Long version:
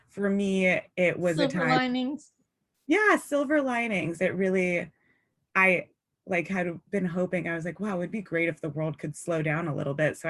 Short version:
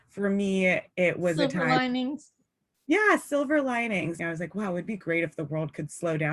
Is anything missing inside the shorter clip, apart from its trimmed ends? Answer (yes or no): yes